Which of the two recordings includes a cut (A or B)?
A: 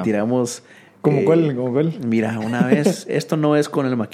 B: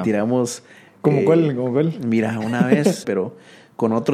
B